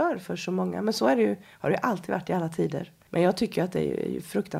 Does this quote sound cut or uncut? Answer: cut